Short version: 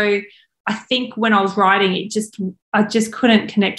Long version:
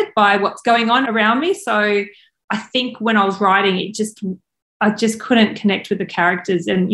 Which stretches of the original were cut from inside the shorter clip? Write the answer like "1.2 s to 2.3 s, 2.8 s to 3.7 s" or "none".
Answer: 4.4 s to 4.7 s